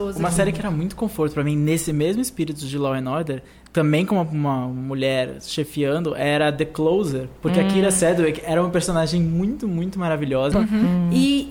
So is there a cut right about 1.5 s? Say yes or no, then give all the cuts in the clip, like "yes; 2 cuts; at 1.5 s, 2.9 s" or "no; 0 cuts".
no; 2 cuts; at 7.4 s, 10.5 s